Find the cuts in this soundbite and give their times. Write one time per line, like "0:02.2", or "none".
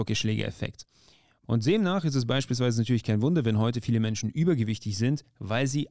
none